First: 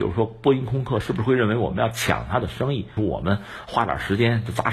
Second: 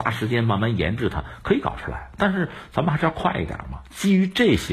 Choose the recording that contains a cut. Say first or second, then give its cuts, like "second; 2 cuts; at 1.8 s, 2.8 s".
first; 1 cut; at 3.0 s